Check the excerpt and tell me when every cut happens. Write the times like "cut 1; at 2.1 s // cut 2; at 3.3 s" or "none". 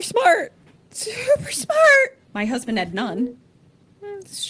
cut 1; at 2.2 s